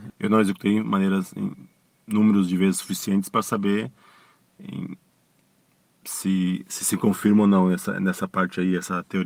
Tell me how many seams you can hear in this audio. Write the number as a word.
zero